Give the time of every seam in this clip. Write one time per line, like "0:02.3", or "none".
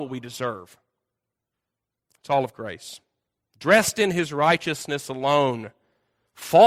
none